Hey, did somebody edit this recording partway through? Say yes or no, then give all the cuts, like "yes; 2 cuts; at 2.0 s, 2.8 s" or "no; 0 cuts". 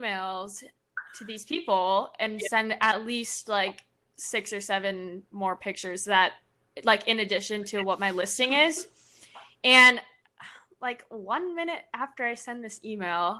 no; 0 cuts